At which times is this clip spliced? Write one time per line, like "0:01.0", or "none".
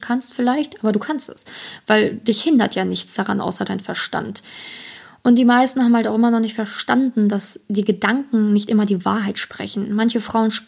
none